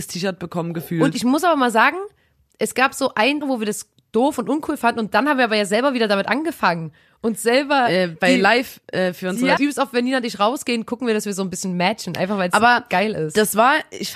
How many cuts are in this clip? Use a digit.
2